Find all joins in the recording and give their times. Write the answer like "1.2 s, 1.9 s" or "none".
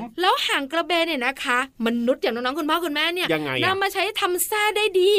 3.3 s